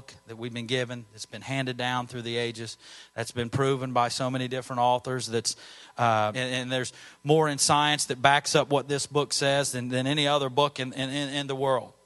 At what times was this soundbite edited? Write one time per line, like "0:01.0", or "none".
0:06.3

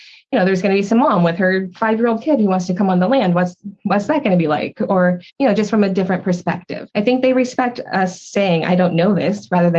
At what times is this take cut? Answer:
0:05.3
0:06.9

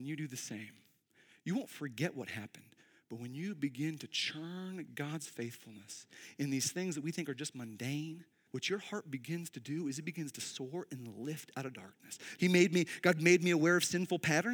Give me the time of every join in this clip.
0:08.5
0:12.4

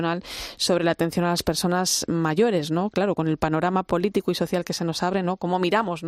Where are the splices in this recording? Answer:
none

